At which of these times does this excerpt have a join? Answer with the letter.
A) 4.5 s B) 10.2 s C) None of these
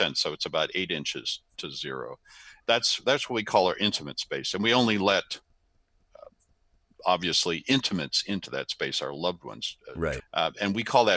B